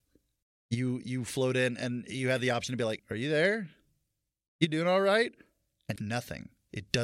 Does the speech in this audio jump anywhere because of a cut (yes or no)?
yes